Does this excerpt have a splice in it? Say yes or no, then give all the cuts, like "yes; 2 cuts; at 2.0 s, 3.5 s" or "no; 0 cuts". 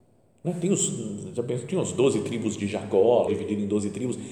yes; 1 cut; at 3.3 s